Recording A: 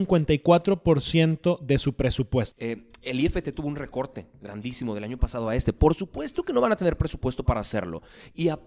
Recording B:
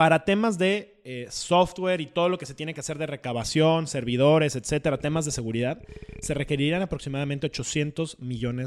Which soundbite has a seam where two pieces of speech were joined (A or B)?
A